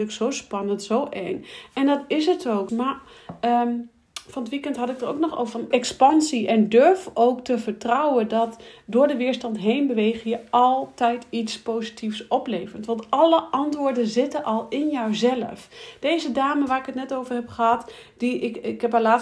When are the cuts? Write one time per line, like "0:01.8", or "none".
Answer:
0:02.7
0:05.7